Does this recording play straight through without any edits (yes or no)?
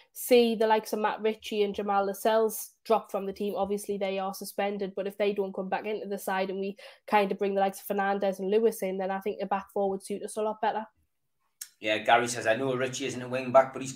yes